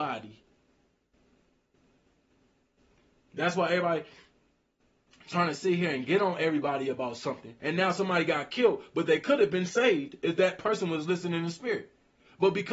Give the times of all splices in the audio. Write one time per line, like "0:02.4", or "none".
0:07.6